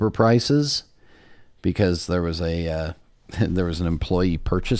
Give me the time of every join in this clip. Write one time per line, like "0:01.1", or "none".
none